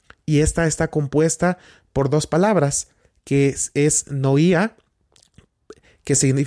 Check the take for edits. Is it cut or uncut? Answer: uncut